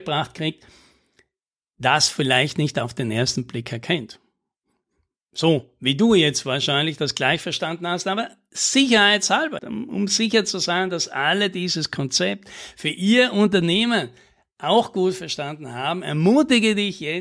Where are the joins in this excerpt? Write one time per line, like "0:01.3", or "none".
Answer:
0:09.6